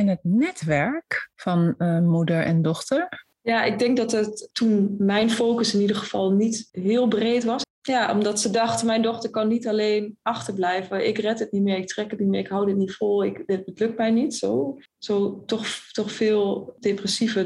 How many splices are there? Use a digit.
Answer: 2